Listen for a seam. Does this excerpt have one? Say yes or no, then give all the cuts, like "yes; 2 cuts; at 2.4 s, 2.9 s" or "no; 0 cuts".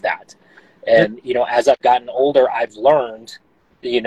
no; 0 cuts